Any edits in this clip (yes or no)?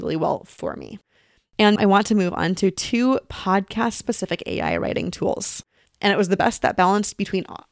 yes